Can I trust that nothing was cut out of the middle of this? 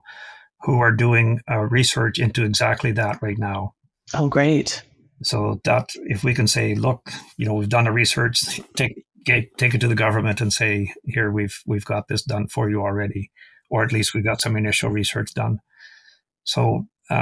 yes; 0 cuts

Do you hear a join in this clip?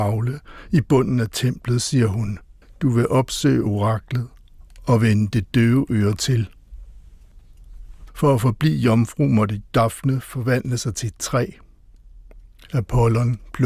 yes; 1 cut; at 8.1 s

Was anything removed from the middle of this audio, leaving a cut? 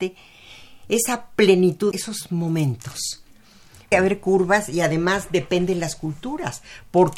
yes; 2 cuts; at 1.9 s, 3.9 s

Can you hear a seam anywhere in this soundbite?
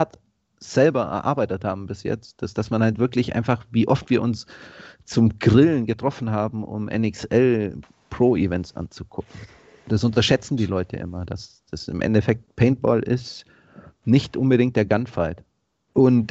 no; 0 cuts

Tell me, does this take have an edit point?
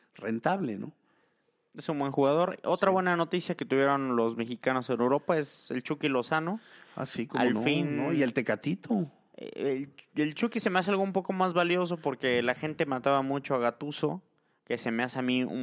no; 0 cuts

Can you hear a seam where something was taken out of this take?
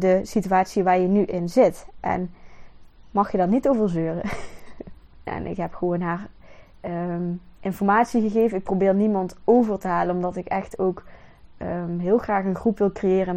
yes; 1 cut; at 5.3 s

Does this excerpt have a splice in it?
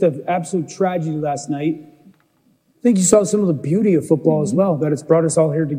no; 0 cuts

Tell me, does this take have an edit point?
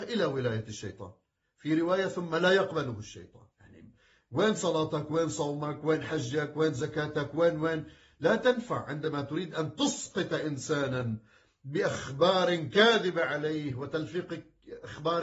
yes; 1 cut; at 3.5 s

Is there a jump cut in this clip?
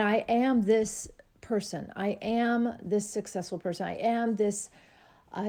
no; 0 cuts

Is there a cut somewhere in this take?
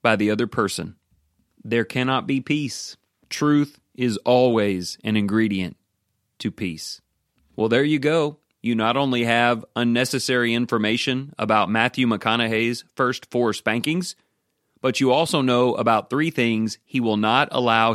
no; 0 cuts

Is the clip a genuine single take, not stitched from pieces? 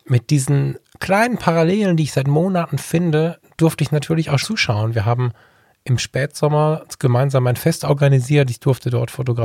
no; 1 cut; at 4.4 s

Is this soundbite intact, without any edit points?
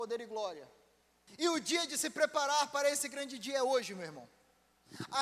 no; 1 cut; at 1.3 s

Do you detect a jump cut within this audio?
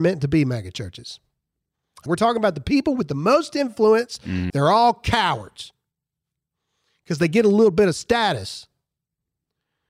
yes; 2 cuts; at 2.1 s, 4.5 s

